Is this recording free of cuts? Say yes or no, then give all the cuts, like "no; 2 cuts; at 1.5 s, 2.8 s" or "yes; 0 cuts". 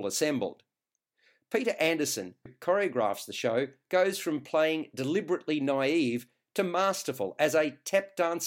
no; 1 cut; at 2.5 s